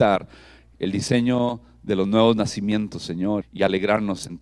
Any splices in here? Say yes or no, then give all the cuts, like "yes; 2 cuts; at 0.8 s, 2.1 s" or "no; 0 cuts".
yes; 1 cut; at 3.4 s